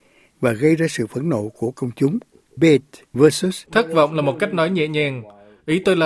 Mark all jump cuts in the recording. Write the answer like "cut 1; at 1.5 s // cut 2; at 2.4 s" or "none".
cut 1; at 2.6 s // cut 2; at 3.7 s